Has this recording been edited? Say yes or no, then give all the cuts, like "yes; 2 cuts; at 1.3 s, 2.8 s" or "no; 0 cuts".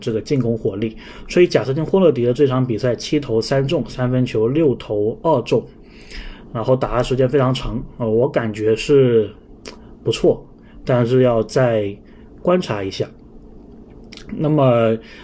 no; 0 cuts